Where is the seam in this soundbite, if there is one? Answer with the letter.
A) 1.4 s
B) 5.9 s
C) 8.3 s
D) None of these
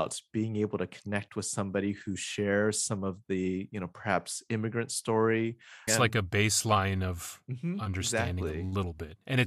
B